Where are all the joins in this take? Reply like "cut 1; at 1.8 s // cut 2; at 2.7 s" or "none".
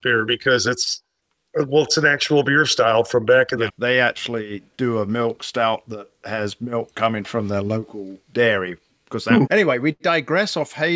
cut 1; at 3.7 s // cut 2; at 8.2 s // cut 3; at 9.5 s

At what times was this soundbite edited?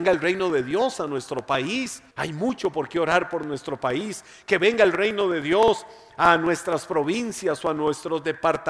cut 1; at 2.1 s

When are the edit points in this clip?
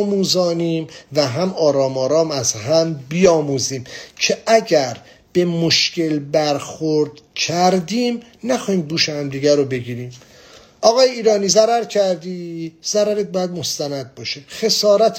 none

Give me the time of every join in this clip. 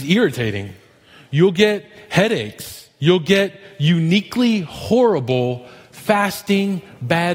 none

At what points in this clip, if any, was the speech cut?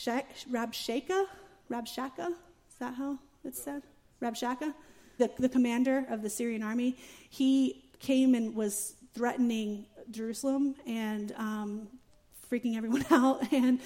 cut 1; at 5.2 s // cut 2; at 7.9 s

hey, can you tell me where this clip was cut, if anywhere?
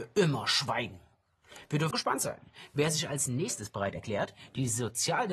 cut 1; at 1.9 s

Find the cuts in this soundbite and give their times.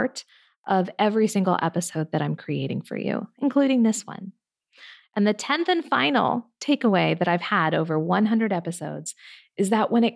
cut 1; at 5.0 s

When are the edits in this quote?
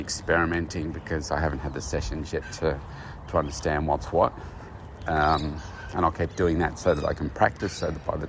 none

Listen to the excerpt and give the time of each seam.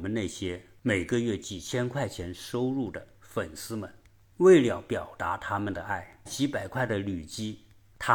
cut 1; at 6.3 s

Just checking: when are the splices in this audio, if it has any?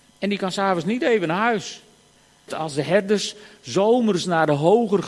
cut 1; at 2.5 s

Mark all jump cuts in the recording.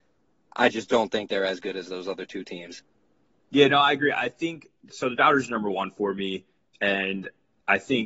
none

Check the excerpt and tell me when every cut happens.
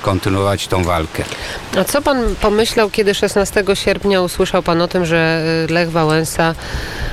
none

